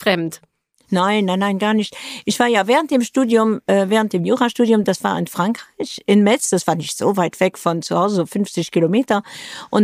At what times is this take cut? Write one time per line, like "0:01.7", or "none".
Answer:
none